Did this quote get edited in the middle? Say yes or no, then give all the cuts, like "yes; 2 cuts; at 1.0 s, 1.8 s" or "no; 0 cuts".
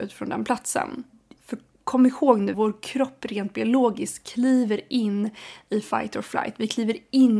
yes; 2 cuts; at 1.4 s, 2.5 s